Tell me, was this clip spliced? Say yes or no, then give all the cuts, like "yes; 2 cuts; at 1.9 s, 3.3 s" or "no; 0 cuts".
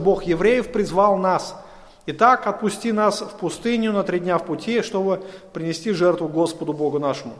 no; 0 cuts